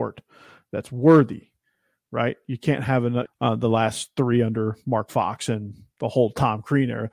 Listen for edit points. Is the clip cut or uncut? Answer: cut